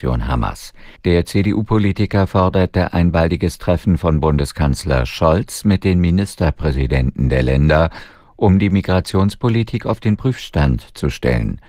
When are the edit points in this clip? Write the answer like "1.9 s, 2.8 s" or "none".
1.0 s